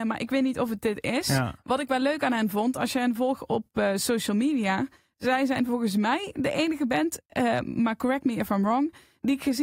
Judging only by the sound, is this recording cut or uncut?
uncut